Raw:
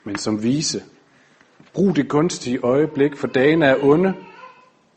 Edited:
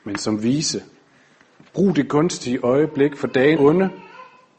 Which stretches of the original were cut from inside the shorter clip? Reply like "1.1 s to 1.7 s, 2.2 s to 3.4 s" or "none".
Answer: 3.6 s to 3.8 s